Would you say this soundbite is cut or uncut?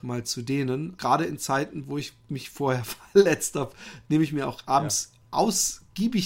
cut